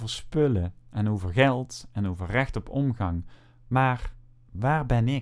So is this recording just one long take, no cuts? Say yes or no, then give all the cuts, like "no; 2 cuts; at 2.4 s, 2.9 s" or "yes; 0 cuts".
yes; 0 cuts